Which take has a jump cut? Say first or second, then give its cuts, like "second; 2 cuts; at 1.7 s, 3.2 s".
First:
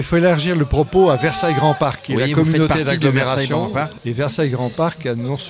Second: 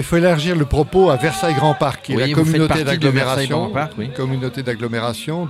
first; 1 cut; at 4.0 s